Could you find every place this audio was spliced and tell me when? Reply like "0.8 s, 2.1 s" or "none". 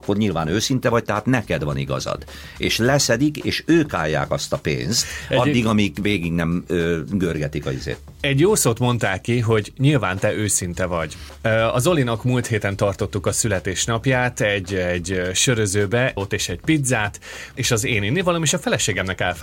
16.2 s, 17.6 s